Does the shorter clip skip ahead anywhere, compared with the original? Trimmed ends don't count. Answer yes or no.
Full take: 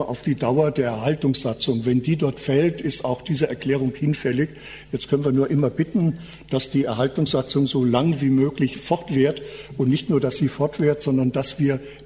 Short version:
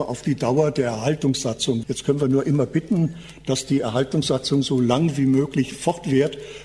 yes